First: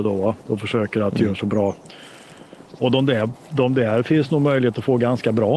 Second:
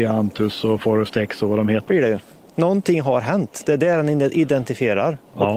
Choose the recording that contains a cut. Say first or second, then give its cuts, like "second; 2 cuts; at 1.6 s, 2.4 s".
second; 1 cut; at 1.9 s